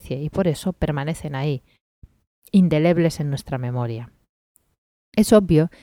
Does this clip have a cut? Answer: no; 0 cuts

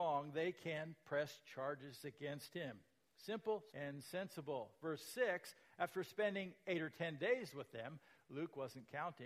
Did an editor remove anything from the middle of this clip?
yes; 1 cut; at 3.7 s

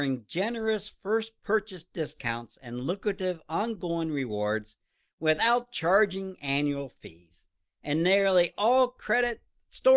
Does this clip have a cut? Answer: no; 0 cuts

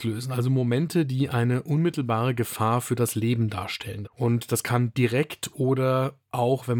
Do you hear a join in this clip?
yes; 1 cut; at 4.0 s

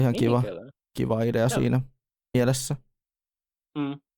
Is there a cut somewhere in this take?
no; 0 cuts

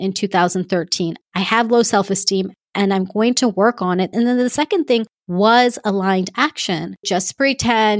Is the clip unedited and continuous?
no; 3 cuts; at 1.2 s, 4.1 s, 7.0 s

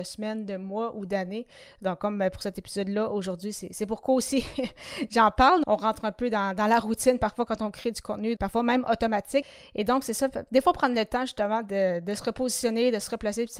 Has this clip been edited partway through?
yes; 2 cuts; at 5.6 s, 8.4 s

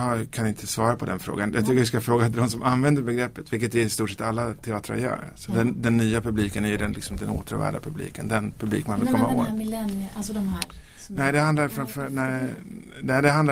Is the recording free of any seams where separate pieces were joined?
yes; 0 cuts

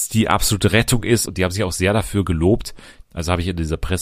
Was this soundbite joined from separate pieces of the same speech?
yes; 2 cuts; at 1.3 s, 3.0 s

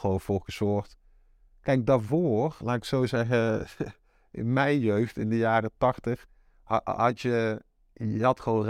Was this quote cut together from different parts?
no; 0 cuts

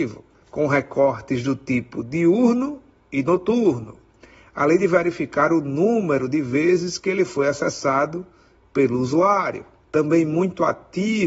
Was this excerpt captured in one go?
no; 1 cut; at 9.8 s

